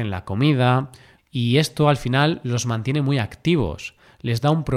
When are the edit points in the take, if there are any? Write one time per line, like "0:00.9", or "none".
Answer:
0:01.2